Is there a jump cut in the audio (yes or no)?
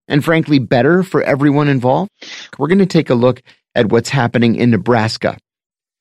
yes